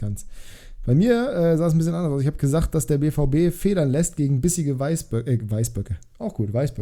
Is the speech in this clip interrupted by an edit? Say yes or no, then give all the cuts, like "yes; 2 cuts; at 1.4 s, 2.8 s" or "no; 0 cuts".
no; 0 cuts